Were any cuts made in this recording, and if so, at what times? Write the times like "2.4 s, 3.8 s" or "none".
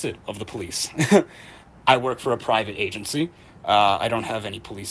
none